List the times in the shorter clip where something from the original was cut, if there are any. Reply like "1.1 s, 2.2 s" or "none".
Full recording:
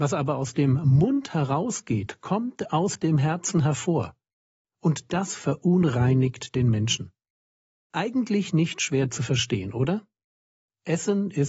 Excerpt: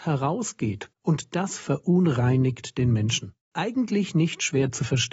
0.9 s, 3.4 s